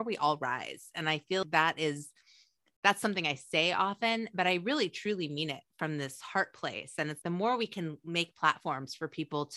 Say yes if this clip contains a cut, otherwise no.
yes